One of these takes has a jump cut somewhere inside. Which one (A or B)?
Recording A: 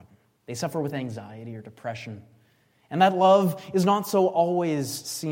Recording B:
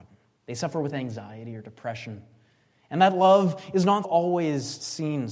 B